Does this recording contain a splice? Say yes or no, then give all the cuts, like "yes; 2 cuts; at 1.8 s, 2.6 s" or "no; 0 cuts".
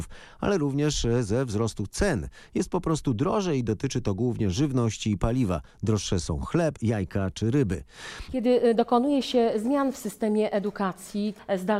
yes; 2 cuts; at 6.8 s, 8.3 s